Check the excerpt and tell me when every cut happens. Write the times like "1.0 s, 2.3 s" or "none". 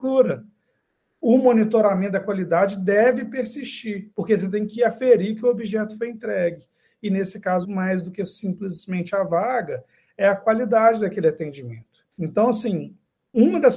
7.6 s, 12.1 s